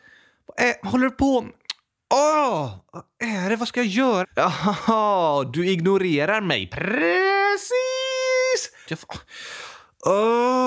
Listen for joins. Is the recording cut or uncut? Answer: cut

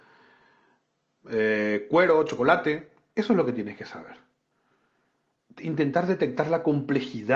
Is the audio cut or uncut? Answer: uncut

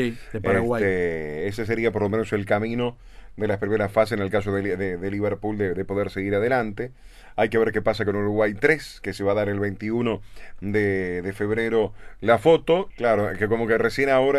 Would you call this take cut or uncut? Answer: cut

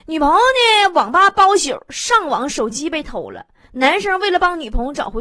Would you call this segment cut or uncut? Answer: uncut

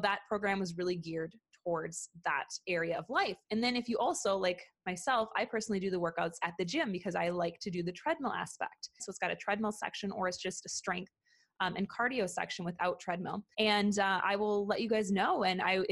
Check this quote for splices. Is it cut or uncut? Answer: cut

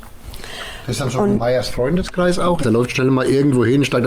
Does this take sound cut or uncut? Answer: cut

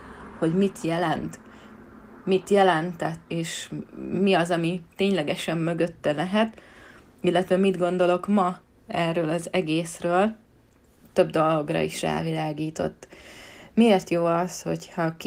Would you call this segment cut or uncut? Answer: cut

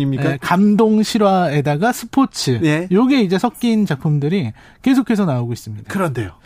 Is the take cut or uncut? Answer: uncut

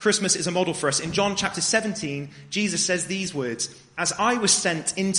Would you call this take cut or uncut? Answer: uncut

